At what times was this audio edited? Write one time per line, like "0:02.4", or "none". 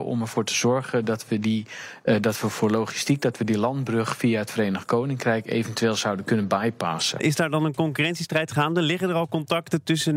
0:07.2